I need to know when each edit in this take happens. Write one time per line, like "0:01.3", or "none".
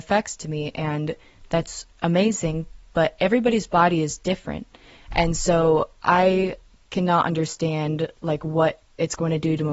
none